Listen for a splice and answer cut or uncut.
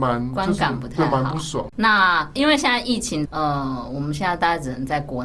cut